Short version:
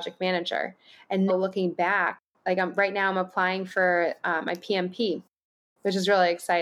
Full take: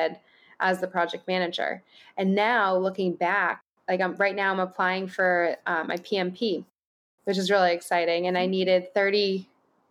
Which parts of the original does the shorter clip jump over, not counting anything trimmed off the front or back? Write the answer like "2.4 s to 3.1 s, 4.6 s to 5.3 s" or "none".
2.3 s to 2.7 s